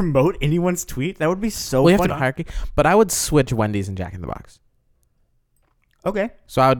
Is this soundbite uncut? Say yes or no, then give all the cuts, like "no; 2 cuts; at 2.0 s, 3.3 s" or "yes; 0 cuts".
no; 1 cut; at 2.1 s